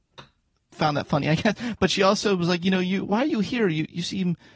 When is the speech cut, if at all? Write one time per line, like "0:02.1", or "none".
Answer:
none